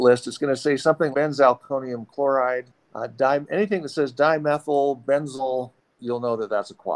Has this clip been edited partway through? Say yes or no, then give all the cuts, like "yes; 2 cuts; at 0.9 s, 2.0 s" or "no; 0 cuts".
yes; 1 cut; at 1.1 s